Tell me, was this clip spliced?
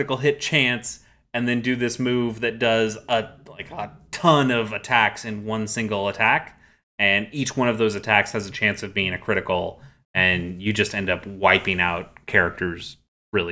no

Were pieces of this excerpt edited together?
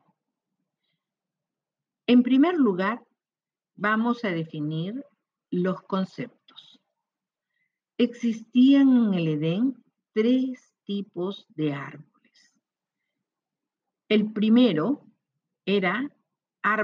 no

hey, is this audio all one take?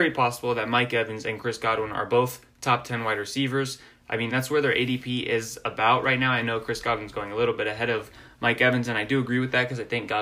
yes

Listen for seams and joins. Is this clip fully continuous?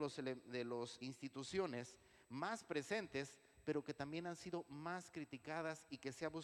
no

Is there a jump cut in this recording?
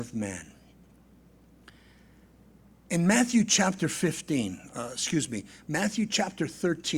no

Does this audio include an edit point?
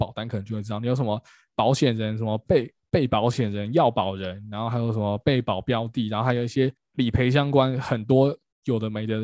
no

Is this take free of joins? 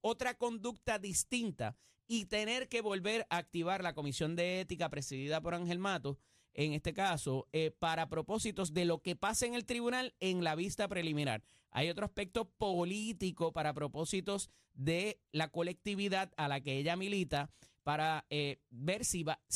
yes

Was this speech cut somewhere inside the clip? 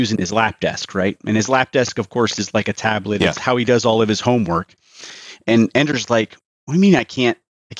no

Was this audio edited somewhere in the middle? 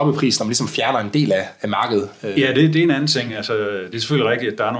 no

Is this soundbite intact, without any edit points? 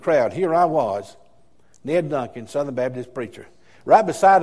yes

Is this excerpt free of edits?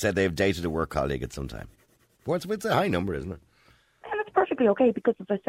yes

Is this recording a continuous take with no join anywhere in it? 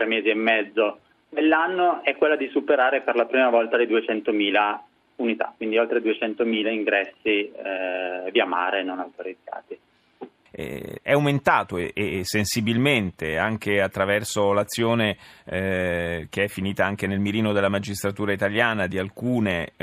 no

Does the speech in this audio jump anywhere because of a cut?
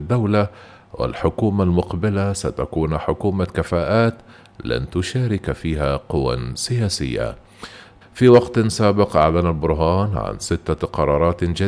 yes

